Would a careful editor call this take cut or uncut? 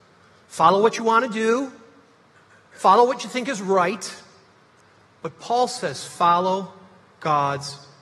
uncut